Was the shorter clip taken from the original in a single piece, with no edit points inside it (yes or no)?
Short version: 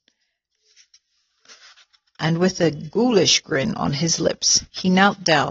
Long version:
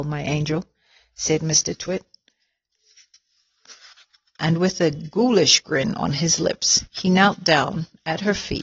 yes